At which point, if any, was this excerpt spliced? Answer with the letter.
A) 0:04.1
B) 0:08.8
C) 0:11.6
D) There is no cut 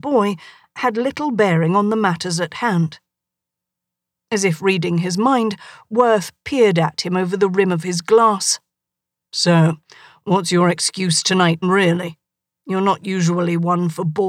C